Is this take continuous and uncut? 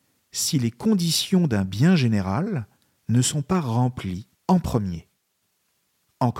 no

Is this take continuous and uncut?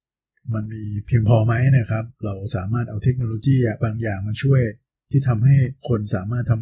yes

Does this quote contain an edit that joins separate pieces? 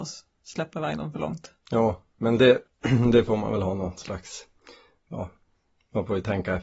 no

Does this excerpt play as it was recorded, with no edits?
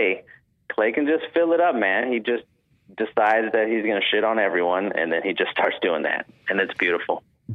yes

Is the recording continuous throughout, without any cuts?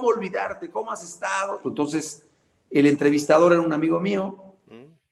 no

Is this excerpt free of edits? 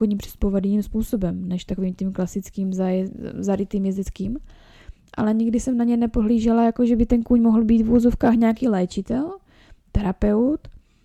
yes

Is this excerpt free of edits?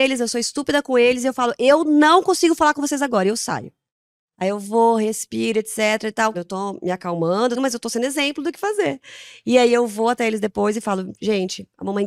no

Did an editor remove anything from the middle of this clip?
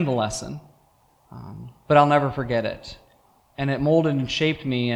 no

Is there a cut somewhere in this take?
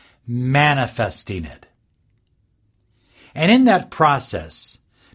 no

